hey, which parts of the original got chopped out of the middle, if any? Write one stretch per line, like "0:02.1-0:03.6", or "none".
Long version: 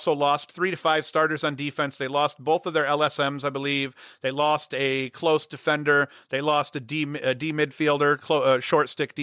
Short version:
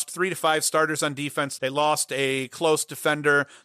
0:02.0-0:04.2